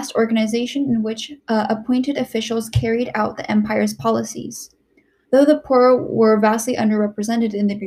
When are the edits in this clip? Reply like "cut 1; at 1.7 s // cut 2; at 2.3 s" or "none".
cut 1; at 1.4 s // cut 2; at 5.2 s